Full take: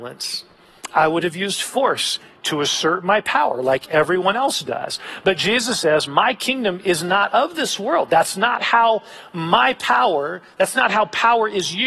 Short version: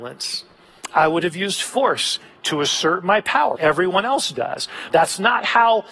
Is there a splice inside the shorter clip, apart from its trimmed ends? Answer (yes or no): yes